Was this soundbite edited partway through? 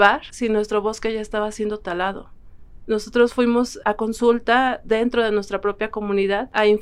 yes; 2 cuts; at 2.8 s, 3.8 s

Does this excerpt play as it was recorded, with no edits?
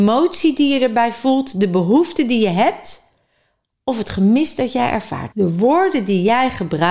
no; 1 cut; at 5.3 s

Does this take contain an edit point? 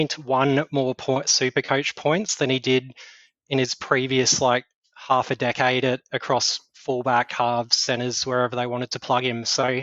no; 0 cuts

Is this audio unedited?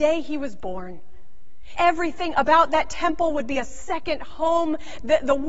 no; 1 cut; at 1.8 s

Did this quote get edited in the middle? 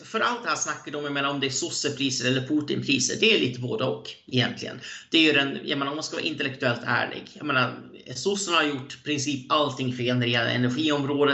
no; 0 cuts

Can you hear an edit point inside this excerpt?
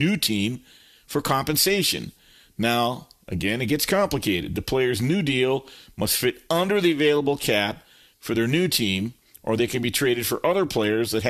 no; 0 cuts

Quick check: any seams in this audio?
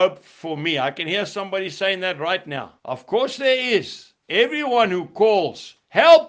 no; 0 cuts

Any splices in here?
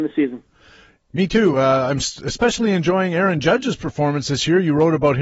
no; 0 cuts

